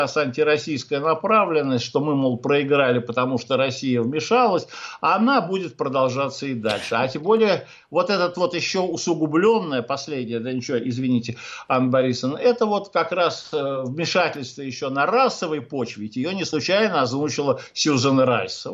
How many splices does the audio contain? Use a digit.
0